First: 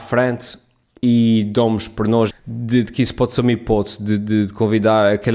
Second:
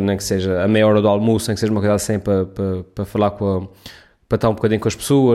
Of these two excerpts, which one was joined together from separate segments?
first; 1 cut; at 2.3 s

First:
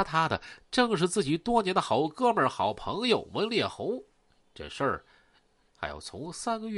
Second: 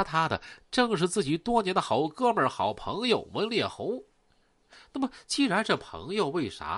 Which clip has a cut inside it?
first; 1 cut; at 4.4 s

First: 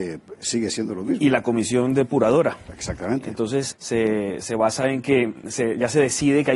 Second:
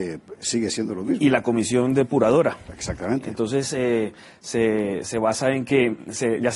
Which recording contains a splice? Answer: first; 1 cut; at 3.7 s

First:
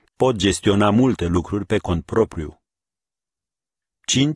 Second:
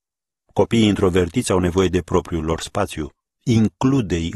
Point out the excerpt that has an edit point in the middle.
second; 1 cut; at 3.3 s

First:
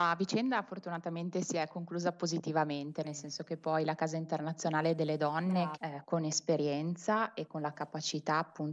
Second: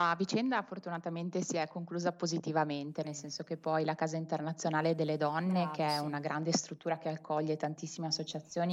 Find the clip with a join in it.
first; 1 cut; at 5.7 s

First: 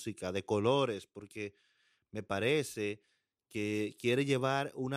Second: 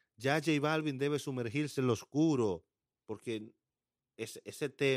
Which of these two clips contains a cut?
second; 1 cut; at 2.9 s

